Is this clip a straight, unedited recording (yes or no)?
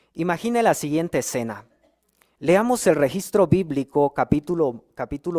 no